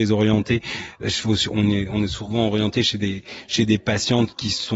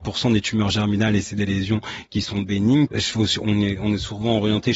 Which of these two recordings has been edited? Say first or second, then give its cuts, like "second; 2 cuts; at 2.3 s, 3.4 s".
second; 1 cut; at 2.9 s